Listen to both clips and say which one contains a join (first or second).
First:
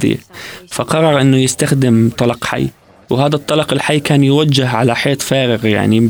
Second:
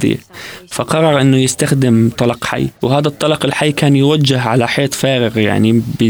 second